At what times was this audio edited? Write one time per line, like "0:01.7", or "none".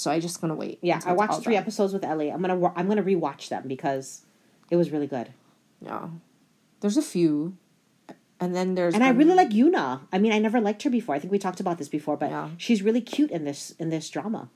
none